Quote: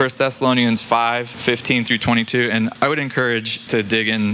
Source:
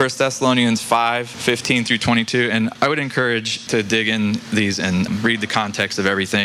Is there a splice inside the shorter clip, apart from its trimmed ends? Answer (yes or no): no